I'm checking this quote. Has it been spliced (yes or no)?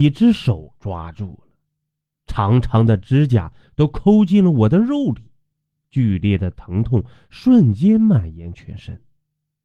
no